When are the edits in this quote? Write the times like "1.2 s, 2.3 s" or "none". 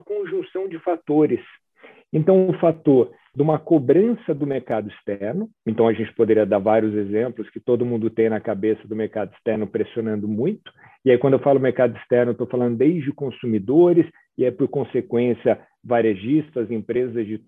5.6 s